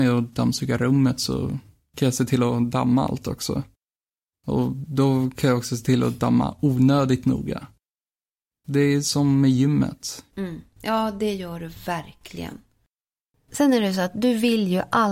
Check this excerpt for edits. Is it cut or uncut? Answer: cut